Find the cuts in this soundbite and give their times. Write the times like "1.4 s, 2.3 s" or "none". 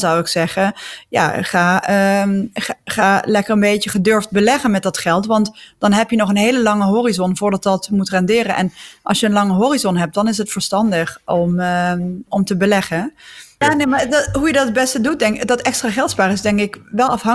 12.3 s, 13.6 s